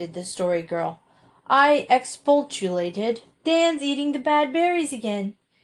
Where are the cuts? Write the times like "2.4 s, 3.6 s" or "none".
1.3 s, 3.3 s